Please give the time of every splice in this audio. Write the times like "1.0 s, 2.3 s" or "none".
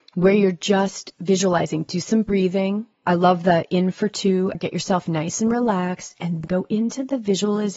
4.5 s, 6.4 s